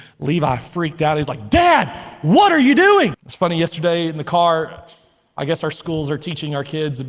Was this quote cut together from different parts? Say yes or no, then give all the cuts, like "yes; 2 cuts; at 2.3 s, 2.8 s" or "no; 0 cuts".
yes; 1 cut; at 3.1 s